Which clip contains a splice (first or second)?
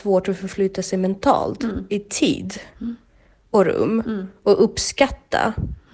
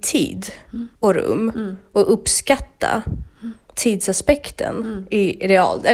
second